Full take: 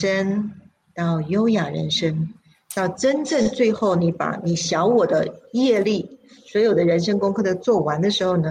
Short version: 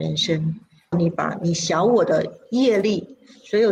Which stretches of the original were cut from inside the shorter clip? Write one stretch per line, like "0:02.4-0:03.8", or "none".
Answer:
0:02.7-0:03.9